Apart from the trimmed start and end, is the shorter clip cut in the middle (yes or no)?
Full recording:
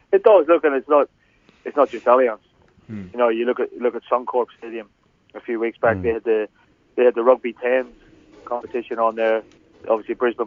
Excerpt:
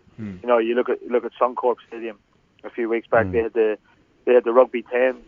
no